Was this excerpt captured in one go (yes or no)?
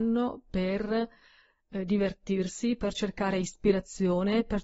yes